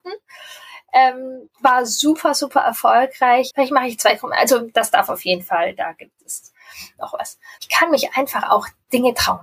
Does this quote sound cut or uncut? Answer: cut